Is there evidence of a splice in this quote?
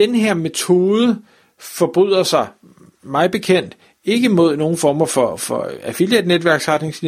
no; 0 cuts

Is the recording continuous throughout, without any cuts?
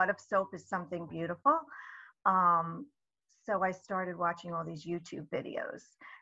yes; 0 cuts

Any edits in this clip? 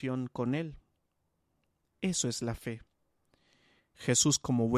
yes; 1 cut; at 3.8 s

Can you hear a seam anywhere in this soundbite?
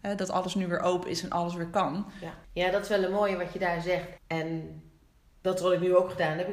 yes; 2 cuts; at 2.4 s, 4.2 s

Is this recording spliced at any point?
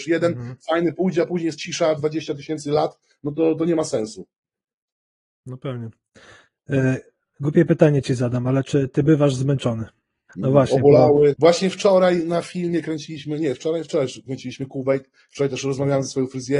yes; 2 cuts; at 10.3 s, 11.3 s

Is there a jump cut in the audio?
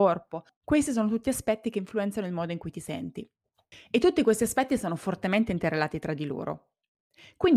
no; 0 cuts

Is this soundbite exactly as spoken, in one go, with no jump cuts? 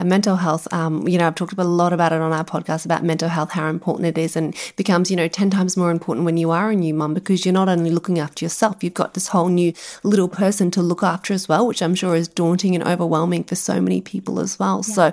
yes; 0 cuts

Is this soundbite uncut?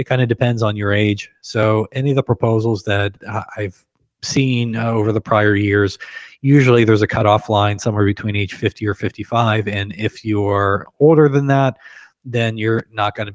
yes; 0 cuts

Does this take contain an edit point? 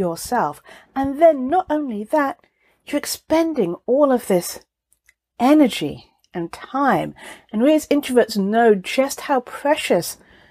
no; 0 cuts

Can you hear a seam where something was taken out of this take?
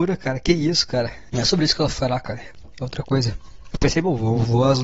yes; 2 cuts; at 1.3 s, 3.7 s

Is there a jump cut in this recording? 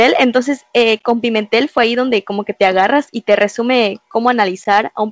no; 0 cuts

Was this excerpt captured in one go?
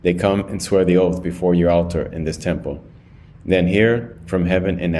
yes; 0 cuts

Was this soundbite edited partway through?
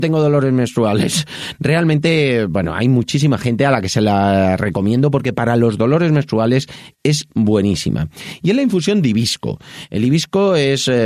no; 0 cuts

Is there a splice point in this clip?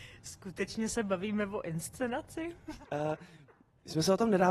yes; 1 cut; at 2.8 s

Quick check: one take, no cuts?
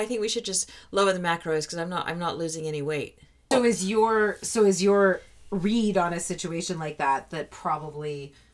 no; 1 cut; at 3.5 s

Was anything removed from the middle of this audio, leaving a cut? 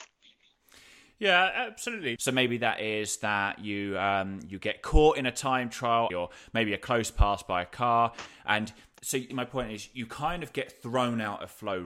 yes; 3 cuts; at 2.2 s, 6.1 s, 9.3 s

